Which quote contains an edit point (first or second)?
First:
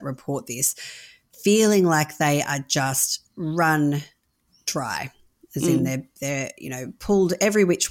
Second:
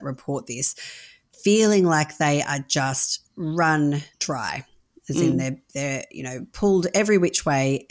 second